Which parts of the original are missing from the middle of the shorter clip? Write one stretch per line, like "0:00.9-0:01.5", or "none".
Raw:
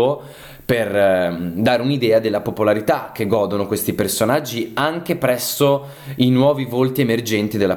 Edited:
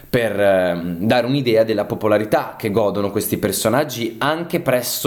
none